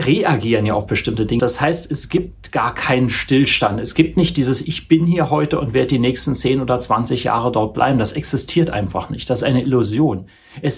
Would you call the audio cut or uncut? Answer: cut